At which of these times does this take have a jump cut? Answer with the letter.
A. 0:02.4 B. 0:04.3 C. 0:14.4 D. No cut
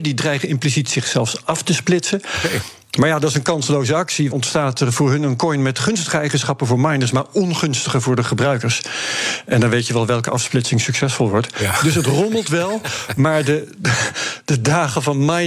B